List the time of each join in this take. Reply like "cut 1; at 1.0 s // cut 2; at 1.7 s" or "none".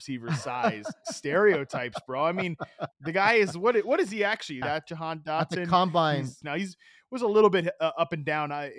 cut 1; at 4.6 s // cut 2; at 6.4 s